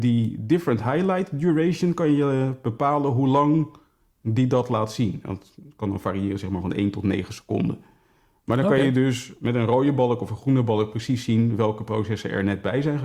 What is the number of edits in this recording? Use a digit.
0